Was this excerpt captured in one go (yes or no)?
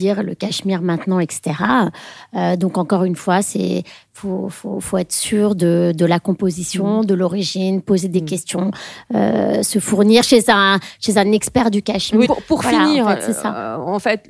no